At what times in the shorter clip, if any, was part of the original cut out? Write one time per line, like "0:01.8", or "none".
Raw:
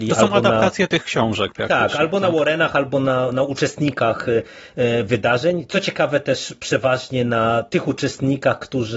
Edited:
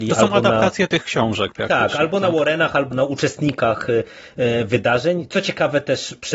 0:02.9